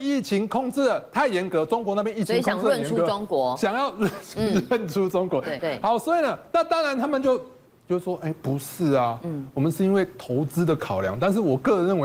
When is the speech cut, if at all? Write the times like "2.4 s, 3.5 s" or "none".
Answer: 5.6 s